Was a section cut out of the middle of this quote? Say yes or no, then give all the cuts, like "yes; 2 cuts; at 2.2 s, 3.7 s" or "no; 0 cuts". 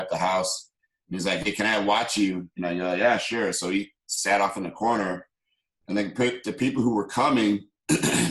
no; 0 cuts